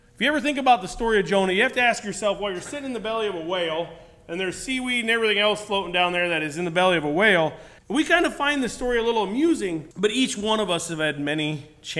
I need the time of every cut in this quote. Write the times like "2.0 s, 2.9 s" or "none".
7.8 s, 9.9 s